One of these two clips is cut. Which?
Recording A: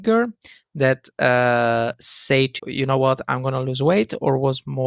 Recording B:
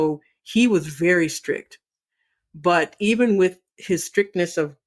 A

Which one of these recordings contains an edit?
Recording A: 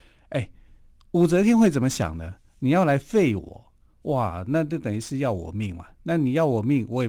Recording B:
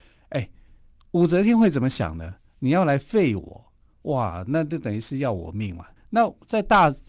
B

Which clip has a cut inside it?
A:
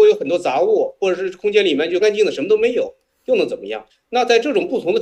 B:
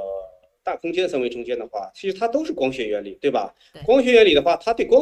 A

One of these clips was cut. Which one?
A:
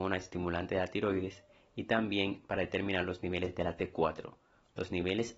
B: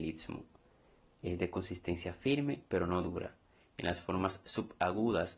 B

